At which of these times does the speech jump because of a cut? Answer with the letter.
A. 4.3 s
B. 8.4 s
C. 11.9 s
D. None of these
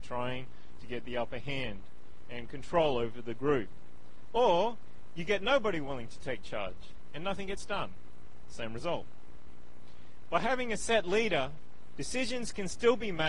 D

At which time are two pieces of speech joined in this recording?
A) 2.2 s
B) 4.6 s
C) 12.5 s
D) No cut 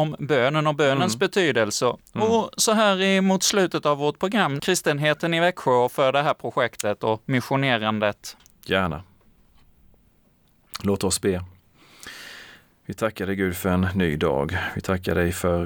B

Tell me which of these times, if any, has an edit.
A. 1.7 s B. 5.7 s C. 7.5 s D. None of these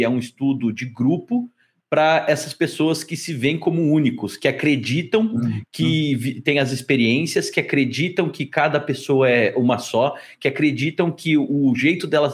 D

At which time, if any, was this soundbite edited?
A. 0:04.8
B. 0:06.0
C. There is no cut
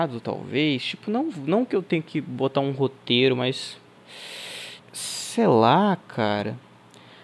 A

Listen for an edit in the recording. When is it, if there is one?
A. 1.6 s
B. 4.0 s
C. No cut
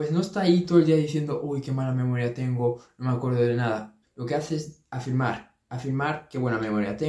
B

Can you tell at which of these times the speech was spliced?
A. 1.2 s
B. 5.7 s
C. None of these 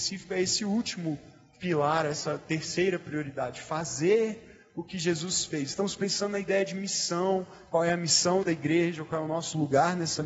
C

